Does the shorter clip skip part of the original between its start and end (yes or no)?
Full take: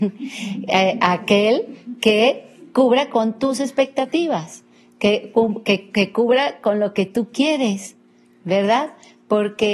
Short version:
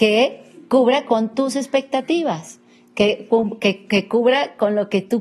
no